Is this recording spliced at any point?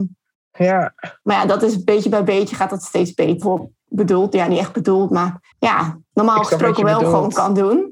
yes; 3 cuts; at 1.2 s, 3.4 s, 5.5 s

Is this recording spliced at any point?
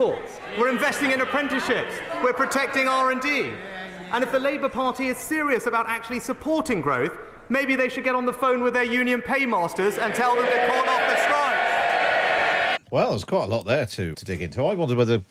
yes; 2 cuts; at 12.8 s, 14.1 s

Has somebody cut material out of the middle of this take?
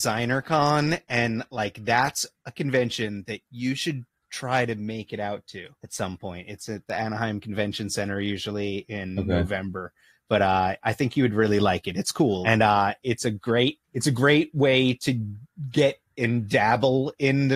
yes; 3 cuts; at 5.7 s, 12.4 s, 13.8 s

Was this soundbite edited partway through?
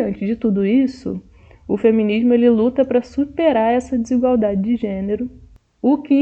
no; 0 cuts

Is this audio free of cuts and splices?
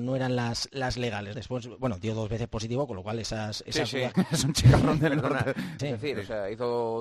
no; 3 cuts; at 1.3 s, 4.1 s, 5.8 s

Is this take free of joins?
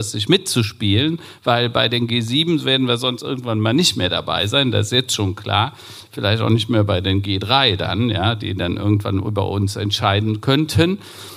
yes; 0 cuts

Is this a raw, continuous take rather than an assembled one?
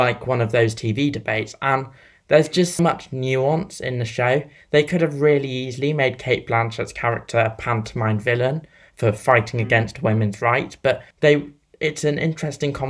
no; 2 cuts; at 2.8 s, 11.1 s

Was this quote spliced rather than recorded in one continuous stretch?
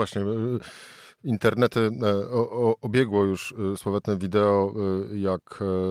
yes; 1 cut; at 3.8 s

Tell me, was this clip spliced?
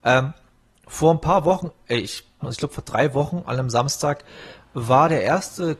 yes; 1 cut; at 2.4 s

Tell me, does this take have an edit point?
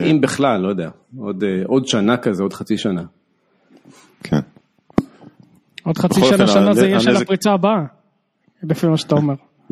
no; 0 cuts

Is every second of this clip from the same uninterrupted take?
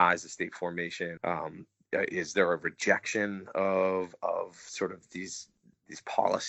no; 1 cut; at 1.2 s

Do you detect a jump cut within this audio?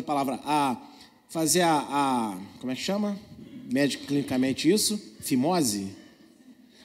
no; 0 cuts

